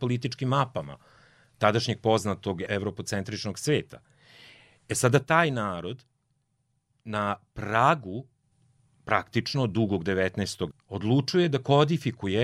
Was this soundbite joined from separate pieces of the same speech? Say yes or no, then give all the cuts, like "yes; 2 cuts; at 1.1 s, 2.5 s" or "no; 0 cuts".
yes; 1 cut; at 10.7 s